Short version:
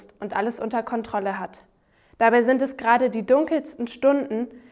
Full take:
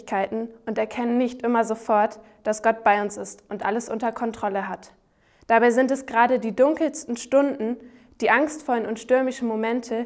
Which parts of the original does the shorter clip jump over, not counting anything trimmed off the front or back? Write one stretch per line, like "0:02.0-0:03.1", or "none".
none